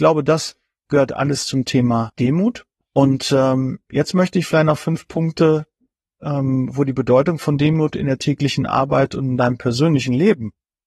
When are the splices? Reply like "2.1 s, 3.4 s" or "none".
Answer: none